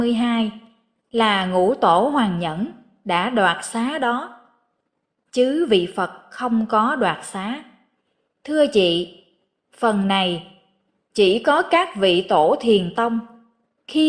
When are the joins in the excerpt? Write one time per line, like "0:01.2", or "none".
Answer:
0:08.4

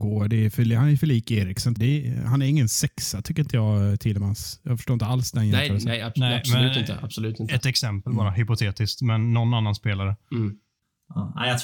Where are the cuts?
0:01.8

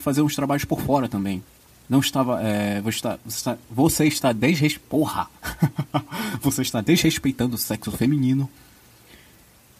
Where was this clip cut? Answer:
0:01.8

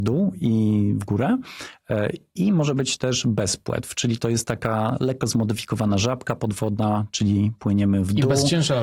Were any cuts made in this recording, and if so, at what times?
none

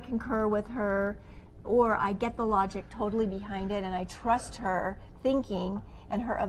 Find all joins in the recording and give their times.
0:01.6

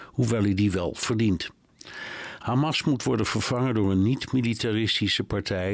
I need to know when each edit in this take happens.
0:02.4

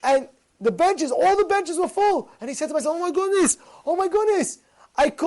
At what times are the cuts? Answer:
none

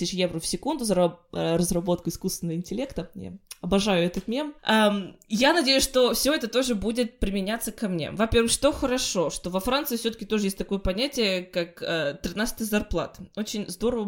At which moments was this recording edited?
0:04.6

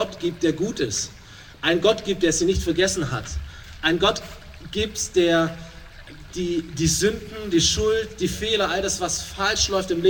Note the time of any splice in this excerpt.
none

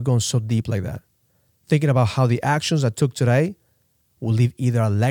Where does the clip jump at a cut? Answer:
none

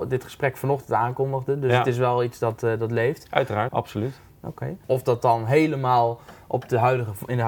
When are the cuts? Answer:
0:03.7
0:04.8

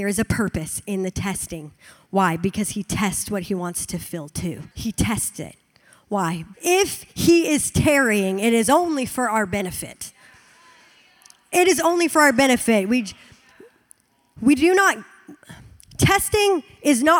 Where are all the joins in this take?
0:04.7
0:06.5

